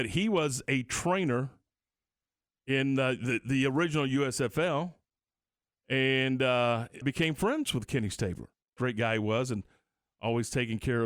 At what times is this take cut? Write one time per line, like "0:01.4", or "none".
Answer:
0:07.0
0:08.8